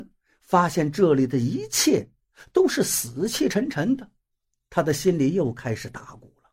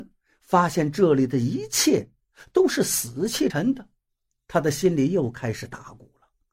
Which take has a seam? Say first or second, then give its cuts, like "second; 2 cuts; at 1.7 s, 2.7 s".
second; 1 cut; at 3.5 s